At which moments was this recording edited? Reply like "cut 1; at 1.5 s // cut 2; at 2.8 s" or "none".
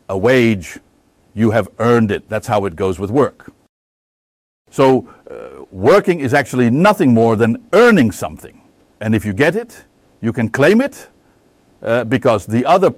none